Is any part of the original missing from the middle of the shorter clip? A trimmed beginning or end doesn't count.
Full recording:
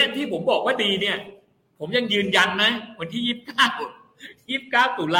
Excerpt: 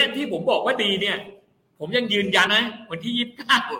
yes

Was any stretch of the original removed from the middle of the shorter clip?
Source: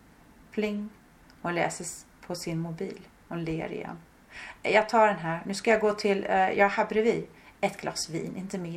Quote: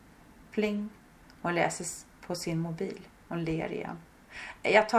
no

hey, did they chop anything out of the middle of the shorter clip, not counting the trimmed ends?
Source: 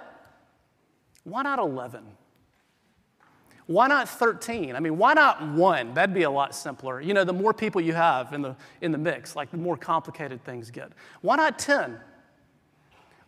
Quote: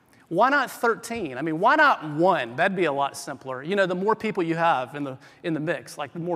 no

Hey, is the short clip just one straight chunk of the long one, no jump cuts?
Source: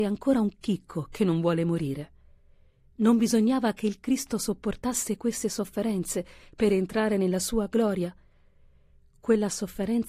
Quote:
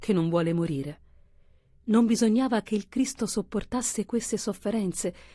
yes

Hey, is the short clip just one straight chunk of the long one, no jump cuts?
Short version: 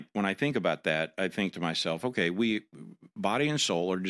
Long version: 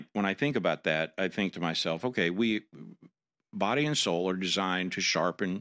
no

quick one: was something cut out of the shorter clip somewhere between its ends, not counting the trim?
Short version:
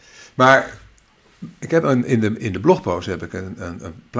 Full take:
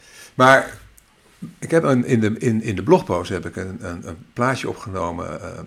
yes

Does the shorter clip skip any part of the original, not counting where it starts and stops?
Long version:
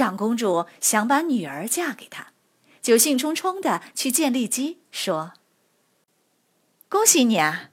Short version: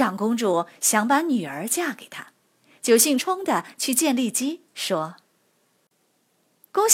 yes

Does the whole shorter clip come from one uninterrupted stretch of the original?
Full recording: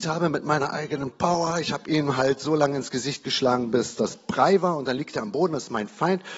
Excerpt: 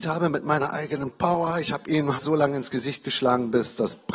no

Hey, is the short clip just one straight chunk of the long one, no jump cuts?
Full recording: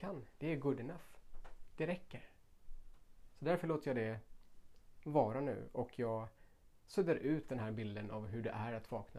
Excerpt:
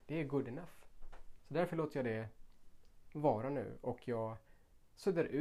no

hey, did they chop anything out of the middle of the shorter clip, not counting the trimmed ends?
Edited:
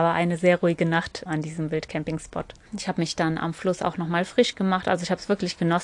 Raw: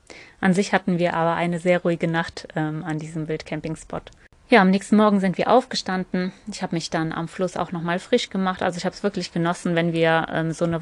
yes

